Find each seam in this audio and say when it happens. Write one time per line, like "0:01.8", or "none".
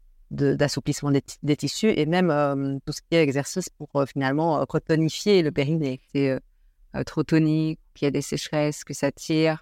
0:06.1